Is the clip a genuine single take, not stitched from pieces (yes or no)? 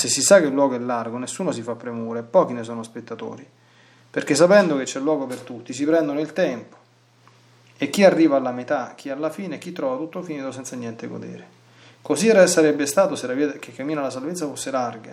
yes